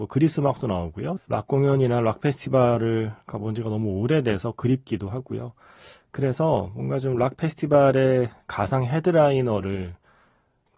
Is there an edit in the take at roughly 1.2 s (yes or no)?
yes